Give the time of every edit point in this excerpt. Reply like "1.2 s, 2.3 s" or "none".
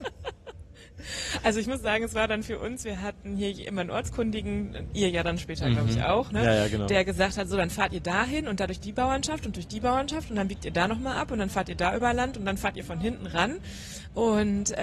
none